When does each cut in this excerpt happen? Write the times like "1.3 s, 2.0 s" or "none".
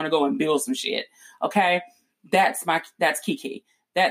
none